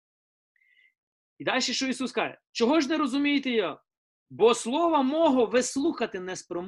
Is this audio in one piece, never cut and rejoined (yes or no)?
yes